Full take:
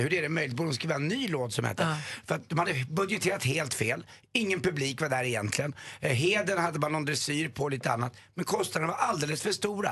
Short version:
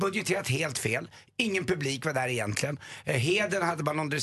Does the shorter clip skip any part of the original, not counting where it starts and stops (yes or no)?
no